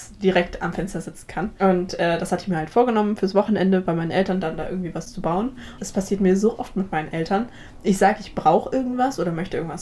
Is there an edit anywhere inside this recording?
yes; 1 cut; at 5.8 s

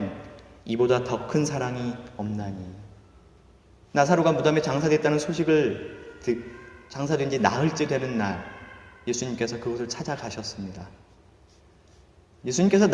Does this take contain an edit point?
yes; 1 cut; at 3.9 s

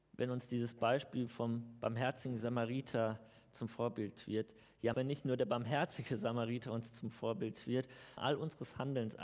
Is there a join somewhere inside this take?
yes; 2 cuts; at 4.9 s, 8.2 s

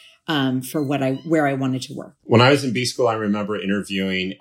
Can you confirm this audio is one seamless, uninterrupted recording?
no; 1 cut; at 2.2 s

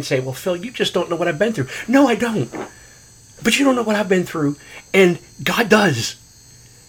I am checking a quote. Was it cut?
no; 0 cuts

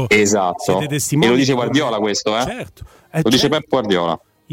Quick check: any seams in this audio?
no; 0 cuts

